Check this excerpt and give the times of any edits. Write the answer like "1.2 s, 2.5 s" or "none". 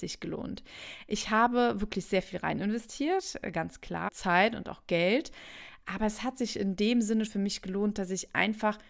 4.1 s, 7.3 s